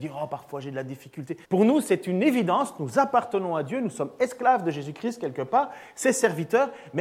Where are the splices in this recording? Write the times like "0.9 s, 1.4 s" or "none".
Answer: 1.4 s